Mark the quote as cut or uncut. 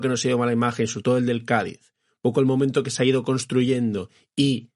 uncut